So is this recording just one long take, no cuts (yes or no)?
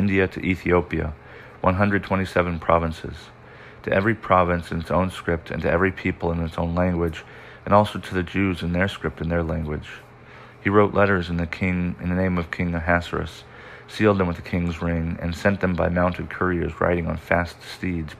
yes